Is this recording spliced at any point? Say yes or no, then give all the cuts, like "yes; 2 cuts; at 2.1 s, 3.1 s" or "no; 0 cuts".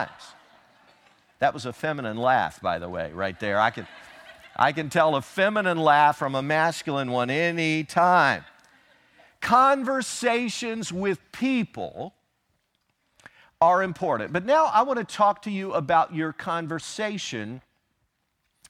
no; 0 cuts